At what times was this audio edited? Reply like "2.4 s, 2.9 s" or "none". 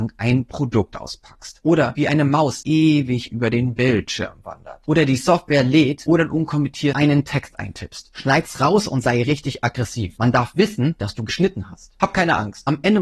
none